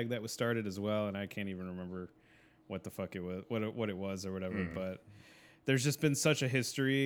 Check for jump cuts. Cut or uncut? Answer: uncut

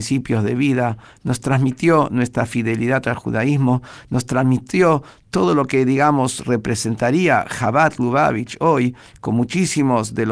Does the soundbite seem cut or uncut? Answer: uncut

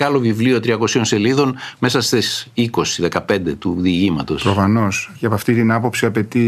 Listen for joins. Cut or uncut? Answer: uncut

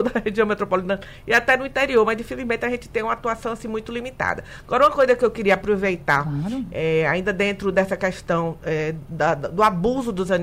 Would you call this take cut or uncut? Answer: uncut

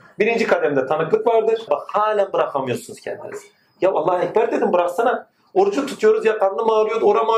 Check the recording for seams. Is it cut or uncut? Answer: cut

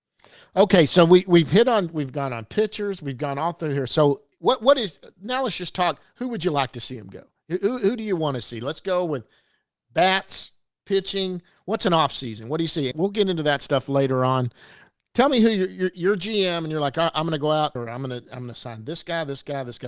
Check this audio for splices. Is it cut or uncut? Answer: cut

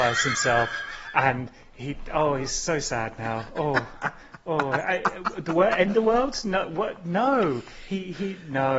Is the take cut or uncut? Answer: uncut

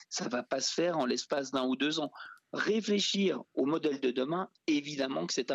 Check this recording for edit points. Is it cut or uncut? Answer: uncut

